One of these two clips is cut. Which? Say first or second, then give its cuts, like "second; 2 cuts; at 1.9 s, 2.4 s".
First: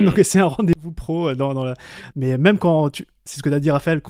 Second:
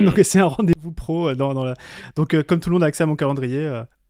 first; 1 cut; at 2.1 s